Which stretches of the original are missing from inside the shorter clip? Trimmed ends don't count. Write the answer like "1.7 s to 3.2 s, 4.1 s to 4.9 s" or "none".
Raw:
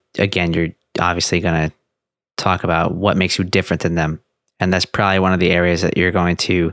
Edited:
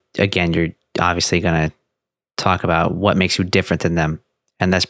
none